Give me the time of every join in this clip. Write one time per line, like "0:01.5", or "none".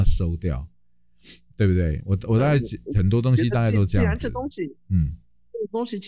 none